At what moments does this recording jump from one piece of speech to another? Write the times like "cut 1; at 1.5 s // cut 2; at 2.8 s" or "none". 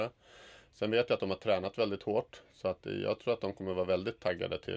none